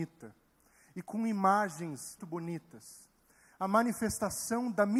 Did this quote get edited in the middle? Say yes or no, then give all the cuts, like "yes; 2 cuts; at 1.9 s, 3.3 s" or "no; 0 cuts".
yes; 1 cut; at 2.2 s